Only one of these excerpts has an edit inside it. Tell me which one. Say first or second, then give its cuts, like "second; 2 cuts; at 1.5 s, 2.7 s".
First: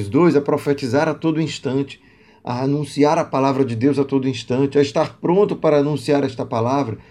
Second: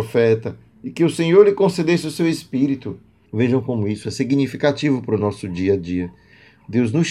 second; 1 cut; at 3.3 s